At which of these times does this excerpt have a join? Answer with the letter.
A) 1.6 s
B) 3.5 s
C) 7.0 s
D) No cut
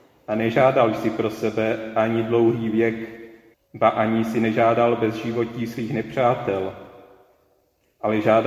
B